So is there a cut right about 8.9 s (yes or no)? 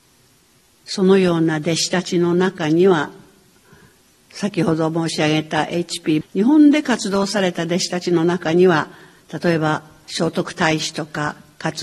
no